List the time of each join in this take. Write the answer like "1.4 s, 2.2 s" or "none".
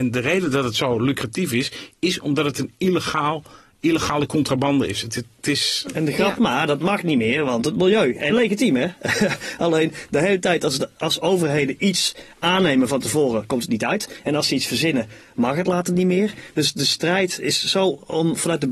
6.4 s, 8.3 s